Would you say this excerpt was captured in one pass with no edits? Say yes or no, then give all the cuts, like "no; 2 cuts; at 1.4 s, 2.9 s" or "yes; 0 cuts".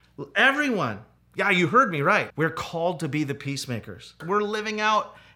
no; 3 cuts; at 1.2 s, 2.3 s, 4.2 s